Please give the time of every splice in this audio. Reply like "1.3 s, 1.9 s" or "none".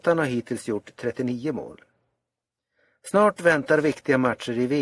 none